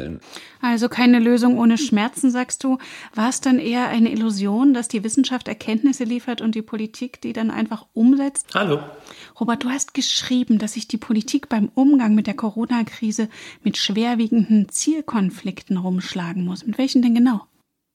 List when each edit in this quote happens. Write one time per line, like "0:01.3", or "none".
0:08.4